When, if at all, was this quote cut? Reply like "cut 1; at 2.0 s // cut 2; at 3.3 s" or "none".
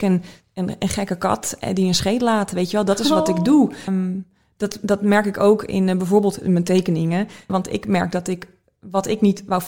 cut 1; at 3.9 s // cut 2; at 7.5 s